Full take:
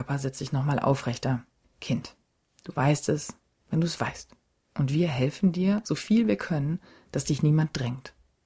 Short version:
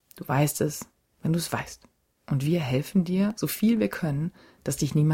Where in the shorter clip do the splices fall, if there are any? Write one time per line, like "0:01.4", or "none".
none